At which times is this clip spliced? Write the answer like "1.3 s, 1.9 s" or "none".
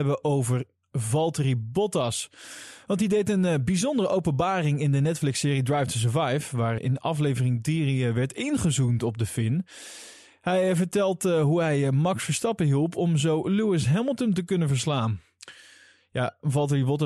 6.8 s